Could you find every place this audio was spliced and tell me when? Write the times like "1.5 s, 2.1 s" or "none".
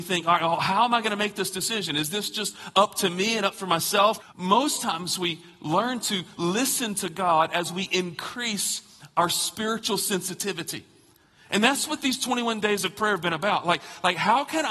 4.2 s